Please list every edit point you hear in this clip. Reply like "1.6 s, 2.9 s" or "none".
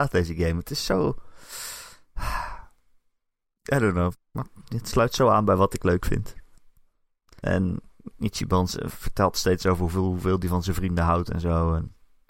4.1 s, 7.4 s